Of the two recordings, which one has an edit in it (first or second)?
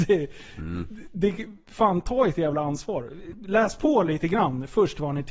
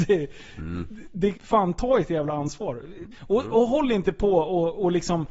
second